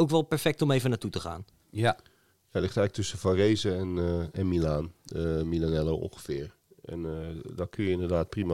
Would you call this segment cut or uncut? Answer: uncut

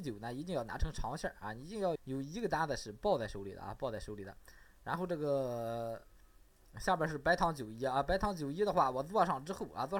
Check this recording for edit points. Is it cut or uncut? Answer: cut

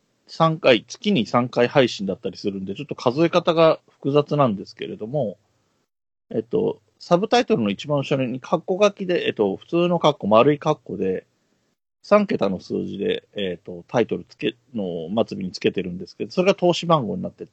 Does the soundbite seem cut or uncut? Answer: uncut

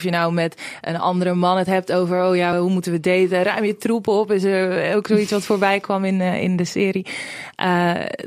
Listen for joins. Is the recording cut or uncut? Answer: cut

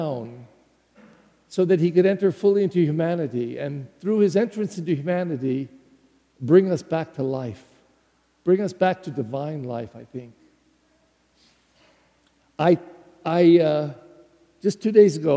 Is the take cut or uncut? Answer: uncut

